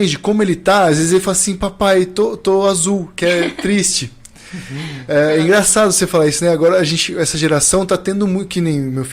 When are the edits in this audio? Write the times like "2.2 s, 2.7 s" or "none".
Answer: none